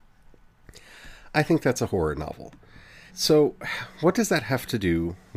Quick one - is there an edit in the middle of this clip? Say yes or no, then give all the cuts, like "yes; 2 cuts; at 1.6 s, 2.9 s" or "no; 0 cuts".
yes; 1 cut; at 3.1 s